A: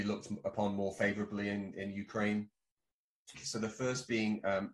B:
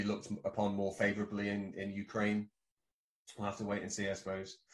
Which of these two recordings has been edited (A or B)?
A